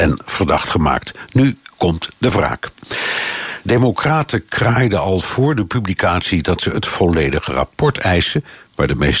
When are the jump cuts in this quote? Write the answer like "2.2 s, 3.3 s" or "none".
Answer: 3.6 s